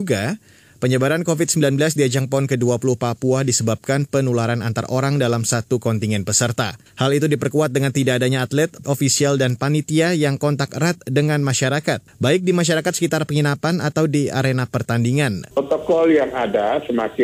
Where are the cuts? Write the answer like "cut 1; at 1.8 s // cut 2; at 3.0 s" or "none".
cut 1; at 8.8 s // cut 2; at 15.5 s